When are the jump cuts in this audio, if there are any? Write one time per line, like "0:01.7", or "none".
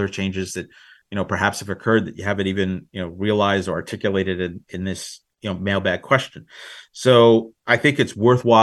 0:05.3